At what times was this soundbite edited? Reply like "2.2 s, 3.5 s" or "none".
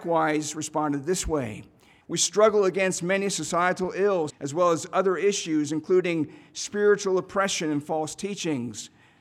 2.0 s, 4.3 s